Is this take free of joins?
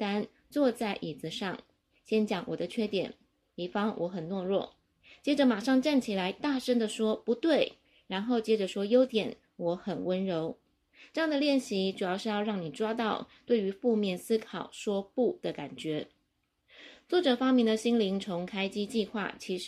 yes; 0 cuts

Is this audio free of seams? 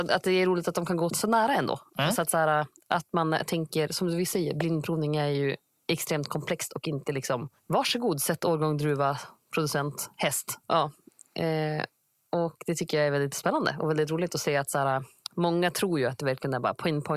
no; 3 cuts; at 1.1 s, 7.6 s, 10.6 s

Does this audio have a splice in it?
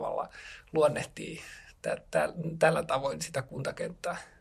no; 0 cuts

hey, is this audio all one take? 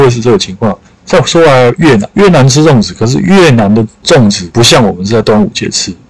no; 1 cut; at 2.1 s

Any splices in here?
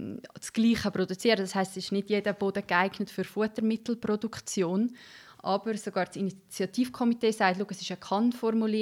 yes; 1 cut; at 5.3 s

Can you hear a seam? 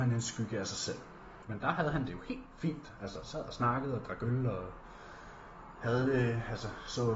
yes; 1 cut; at 1.4 s

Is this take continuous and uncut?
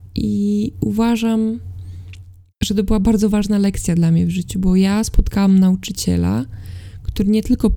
yes; 0 cuts

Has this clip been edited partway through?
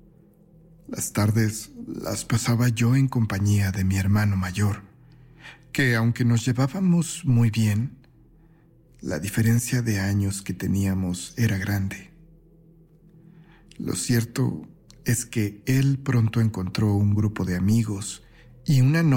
no; 0 cuts

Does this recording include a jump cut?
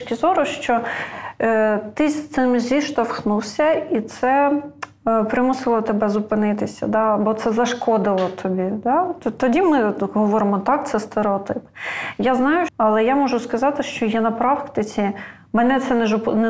yes; 1 cut; at 12.7 s

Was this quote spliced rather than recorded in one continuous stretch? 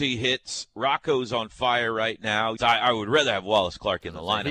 yes; 1 cut; at 2.6 s

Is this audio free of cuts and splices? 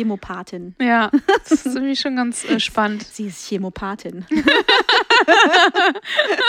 yes; 0 cuts

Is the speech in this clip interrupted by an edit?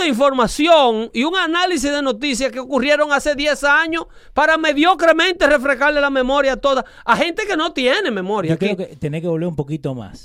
no; 0 cuts

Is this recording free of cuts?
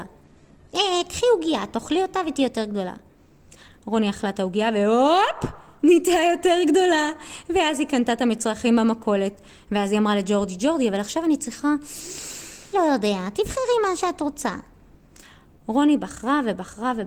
no; 1 cut; at 12.7 s

